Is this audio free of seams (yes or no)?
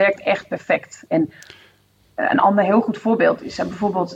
no